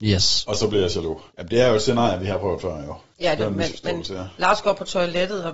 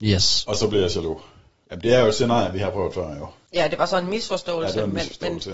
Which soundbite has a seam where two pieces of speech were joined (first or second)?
first